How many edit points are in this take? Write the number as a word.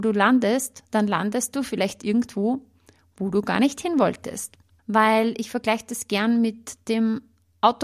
one